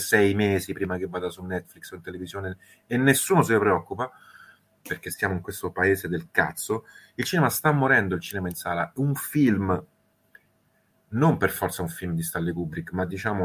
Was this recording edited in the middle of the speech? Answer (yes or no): no